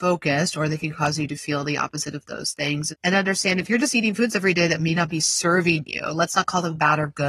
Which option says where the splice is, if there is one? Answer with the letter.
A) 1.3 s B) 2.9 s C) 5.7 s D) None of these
B